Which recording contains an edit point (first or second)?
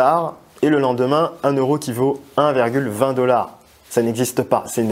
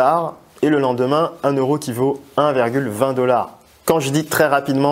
second